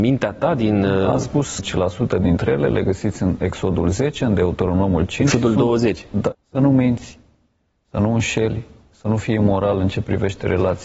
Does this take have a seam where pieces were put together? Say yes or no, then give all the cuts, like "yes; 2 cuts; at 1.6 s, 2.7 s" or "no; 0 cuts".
yes; 2 cuts; at 1.6 s, 6.3 s